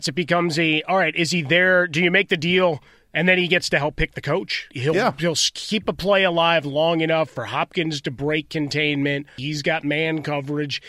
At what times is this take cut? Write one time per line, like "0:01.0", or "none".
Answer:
0:04.7
0:09.4